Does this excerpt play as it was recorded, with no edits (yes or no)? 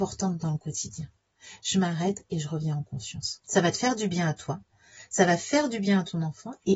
yes